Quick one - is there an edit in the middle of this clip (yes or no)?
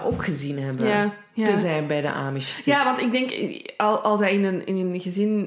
no